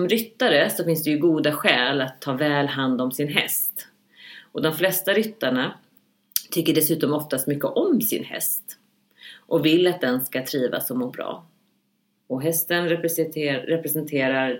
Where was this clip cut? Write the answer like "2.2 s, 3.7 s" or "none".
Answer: 12.2 s